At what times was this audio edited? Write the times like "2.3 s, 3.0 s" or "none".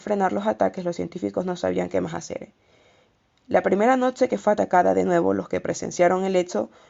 3.3 s